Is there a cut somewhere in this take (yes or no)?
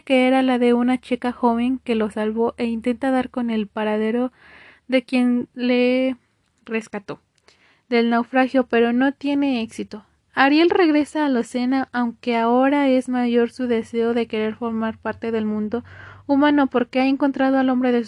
no